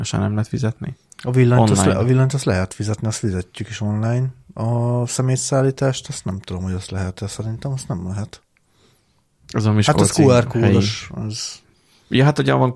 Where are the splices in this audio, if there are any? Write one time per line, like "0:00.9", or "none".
none